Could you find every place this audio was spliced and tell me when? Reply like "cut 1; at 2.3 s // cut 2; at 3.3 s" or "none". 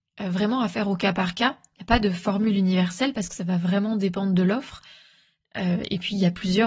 none